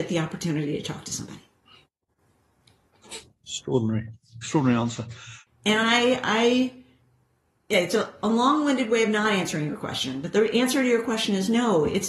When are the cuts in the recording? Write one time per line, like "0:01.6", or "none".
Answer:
0:05.5